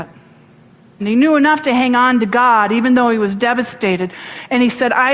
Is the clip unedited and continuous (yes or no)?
no